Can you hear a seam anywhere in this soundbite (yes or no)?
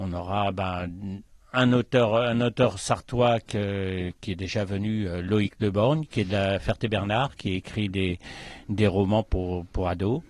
no